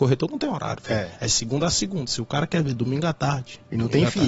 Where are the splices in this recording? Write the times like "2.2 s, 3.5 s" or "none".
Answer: none